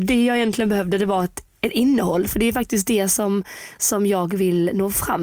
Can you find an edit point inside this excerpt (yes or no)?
no